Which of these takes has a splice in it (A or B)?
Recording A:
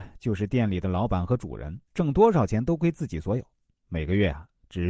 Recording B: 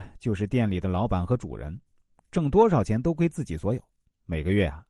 A